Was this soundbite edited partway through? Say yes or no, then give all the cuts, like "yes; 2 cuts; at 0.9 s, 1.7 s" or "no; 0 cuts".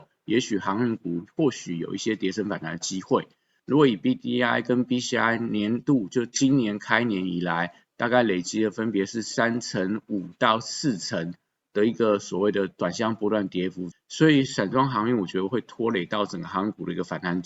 yes; 2 cuts; at 3.6 s, 13.9 s